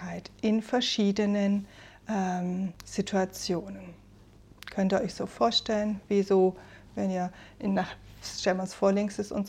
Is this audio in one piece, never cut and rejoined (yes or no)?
yes